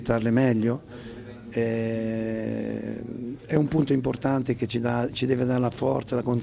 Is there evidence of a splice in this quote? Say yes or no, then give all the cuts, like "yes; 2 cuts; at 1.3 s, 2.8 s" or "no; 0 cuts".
no; 0 cuts